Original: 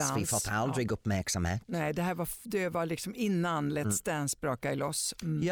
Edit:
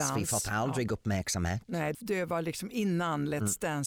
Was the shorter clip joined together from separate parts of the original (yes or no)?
yes